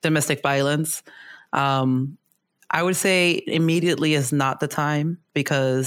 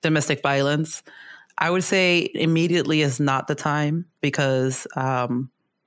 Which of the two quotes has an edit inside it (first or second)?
second